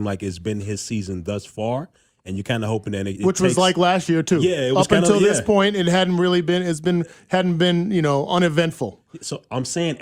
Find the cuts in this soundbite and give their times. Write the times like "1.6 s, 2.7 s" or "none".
3.2 s

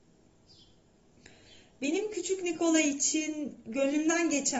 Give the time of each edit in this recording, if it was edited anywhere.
none

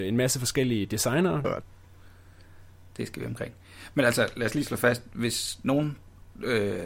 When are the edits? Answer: 1.4 s

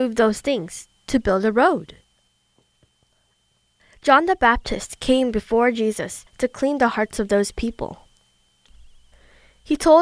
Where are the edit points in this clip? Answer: none

